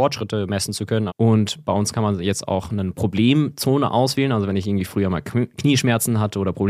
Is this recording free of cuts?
no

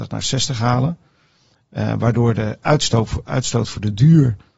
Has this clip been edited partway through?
no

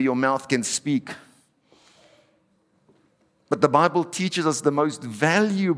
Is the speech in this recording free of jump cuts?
yes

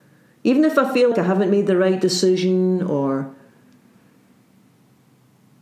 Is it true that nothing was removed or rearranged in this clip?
no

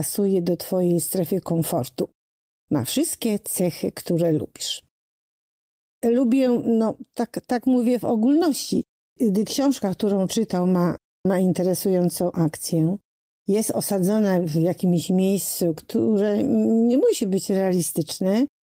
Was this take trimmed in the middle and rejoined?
no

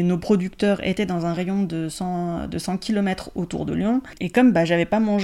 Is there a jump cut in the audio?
yes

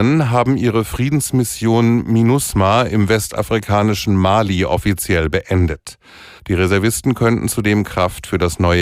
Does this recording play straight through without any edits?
no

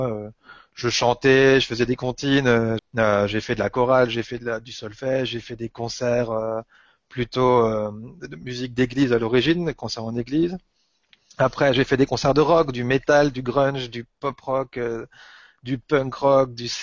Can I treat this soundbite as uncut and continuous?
no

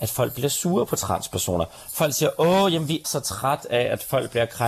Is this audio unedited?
no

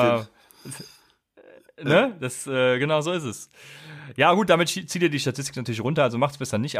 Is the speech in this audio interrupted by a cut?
no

